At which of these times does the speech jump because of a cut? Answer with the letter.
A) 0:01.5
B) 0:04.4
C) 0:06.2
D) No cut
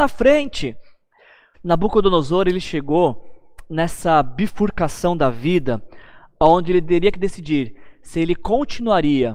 A